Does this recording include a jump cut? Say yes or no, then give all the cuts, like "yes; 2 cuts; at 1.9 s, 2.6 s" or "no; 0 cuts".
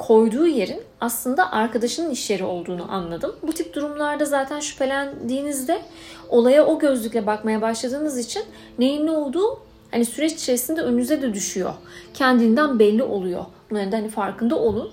no; 0 cuts